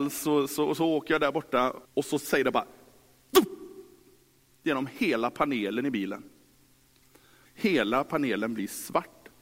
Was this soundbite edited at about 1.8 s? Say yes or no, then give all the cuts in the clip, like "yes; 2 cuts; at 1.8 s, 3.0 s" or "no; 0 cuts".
yes; 2 cuts; at 1.8 s, 7.4 s